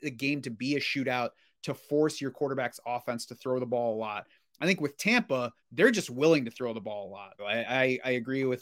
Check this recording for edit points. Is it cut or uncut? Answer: cut